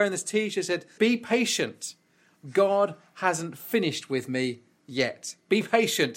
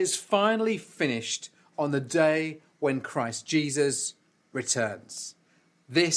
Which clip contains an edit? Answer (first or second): first